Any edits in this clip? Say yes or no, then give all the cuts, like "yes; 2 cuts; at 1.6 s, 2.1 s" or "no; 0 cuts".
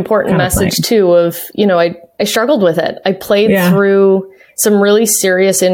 no; 0 cuts